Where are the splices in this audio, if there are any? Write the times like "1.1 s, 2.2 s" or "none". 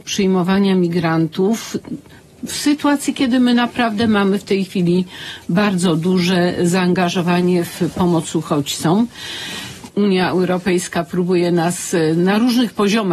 9.9 s